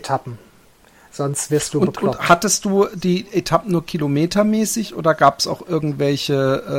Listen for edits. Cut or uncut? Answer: uncut